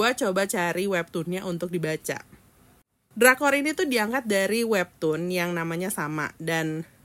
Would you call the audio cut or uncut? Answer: cut